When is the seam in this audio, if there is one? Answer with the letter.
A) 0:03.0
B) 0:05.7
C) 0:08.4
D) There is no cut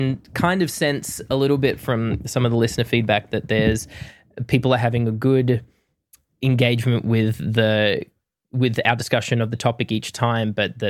D